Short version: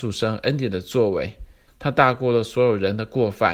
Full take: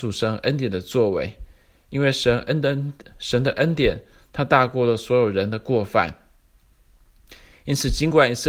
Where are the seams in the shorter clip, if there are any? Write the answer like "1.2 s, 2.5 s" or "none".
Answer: 1.7 s